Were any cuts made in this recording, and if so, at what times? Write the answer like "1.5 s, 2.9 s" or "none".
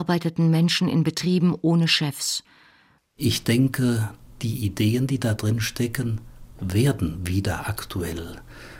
3.0 s